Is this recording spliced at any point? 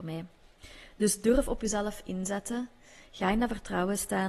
no; 0 cuts

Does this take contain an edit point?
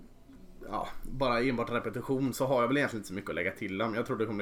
yes; 1 cut; at 2.3 s

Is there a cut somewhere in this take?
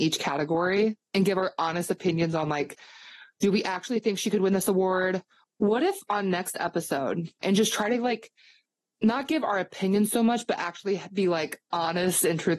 yes; 2 cuts; at 5.4 s, 7.4 s

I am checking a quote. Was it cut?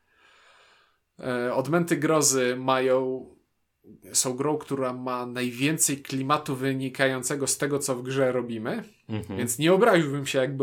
no; 0 cuts

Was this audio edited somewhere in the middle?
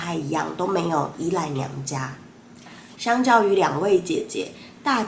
yes; 1 cut; at 2.9 s

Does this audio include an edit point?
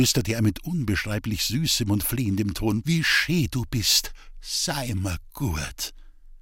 yes; 1 cut; at 2.8 s

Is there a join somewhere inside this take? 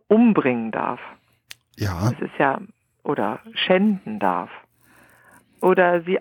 no; 0 cuts

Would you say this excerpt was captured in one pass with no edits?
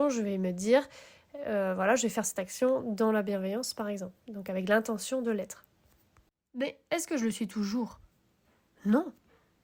yes; 0 cuts

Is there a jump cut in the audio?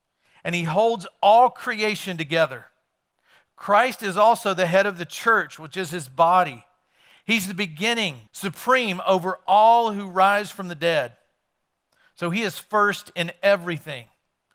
yes; 1 cut; at 8.3 s

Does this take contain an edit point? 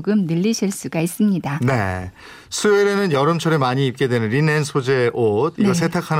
no; 0 cuts

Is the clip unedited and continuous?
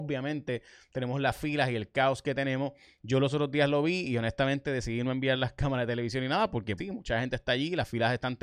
no; 1 cut; at 6.8 s

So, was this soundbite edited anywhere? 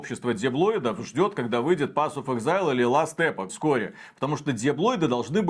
yes; 1 cut; at 3.5 s

